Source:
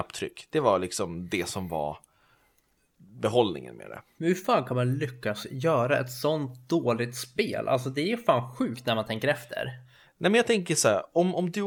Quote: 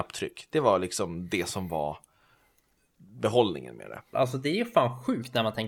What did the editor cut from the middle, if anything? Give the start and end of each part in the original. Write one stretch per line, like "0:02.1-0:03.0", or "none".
0:04.1-0:07.6

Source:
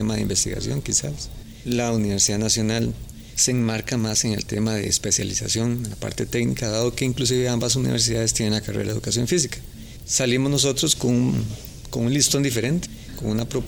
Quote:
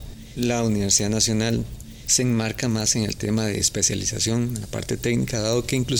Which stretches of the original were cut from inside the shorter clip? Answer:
none

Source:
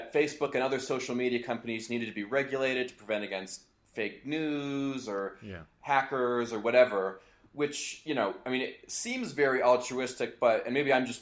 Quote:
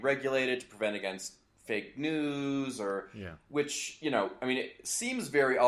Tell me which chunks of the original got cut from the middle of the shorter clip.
0:05.7-0:07.5

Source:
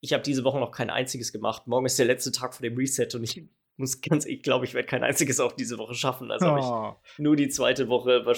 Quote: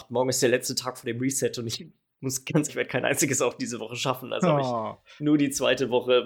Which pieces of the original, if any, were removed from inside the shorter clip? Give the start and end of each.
0:04.2-0:04.7

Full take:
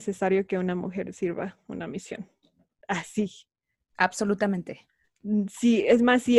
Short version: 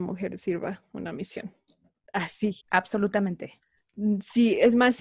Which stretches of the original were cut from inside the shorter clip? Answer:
0:03.4-0:03.9

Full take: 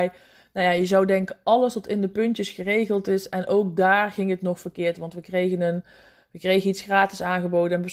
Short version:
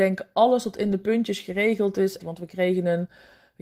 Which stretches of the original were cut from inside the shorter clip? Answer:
0:03.3-0:04.9

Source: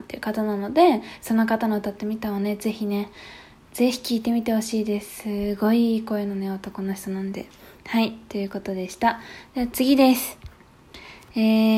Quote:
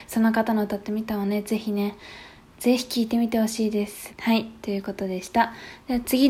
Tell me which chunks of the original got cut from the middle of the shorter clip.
0:05.2-0:07.8

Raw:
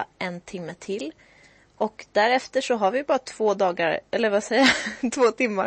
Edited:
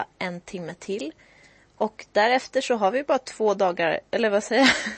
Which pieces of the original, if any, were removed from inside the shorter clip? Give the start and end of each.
none

